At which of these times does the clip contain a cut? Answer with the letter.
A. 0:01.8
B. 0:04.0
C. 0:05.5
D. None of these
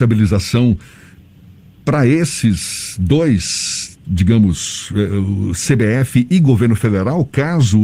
B